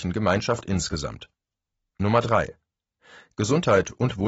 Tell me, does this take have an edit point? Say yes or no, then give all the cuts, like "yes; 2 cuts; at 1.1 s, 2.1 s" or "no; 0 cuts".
no; 0 cuts